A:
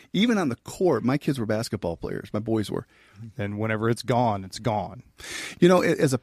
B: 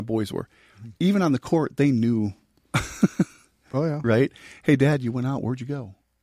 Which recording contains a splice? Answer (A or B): A